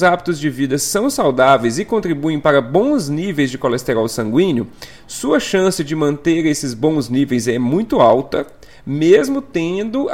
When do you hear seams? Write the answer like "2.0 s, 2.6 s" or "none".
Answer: none